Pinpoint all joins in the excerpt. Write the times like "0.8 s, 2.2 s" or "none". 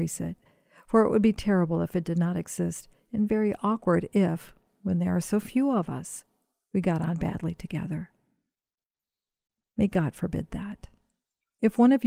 none